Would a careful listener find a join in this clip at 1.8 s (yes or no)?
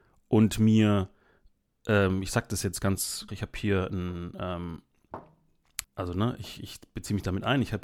no